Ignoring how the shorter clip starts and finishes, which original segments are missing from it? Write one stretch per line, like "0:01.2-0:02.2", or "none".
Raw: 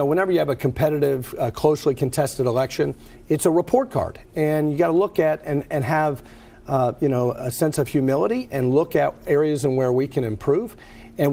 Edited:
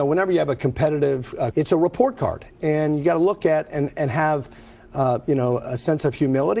0:01.5-0:03.2